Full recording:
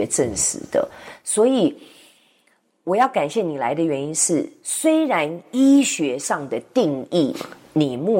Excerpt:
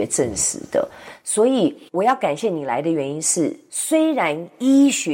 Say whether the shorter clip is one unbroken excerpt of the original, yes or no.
no